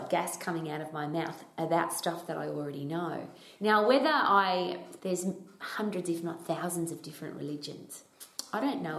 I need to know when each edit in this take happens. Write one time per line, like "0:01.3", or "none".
0:03.6
0:05.0